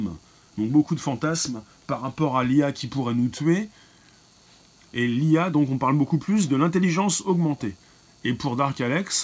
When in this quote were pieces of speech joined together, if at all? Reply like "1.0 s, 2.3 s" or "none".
none